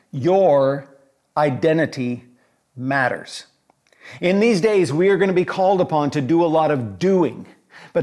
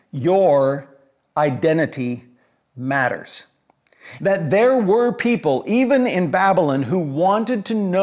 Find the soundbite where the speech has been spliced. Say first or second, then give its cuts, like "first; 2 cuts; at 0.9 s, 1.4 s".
second; 1 cut; at 4.2 s